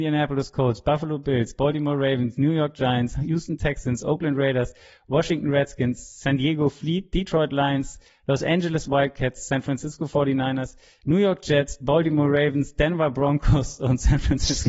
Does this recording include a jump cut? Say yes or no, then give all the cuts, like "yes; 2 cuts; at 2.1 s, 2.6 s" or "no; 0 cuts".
no; 0 cuts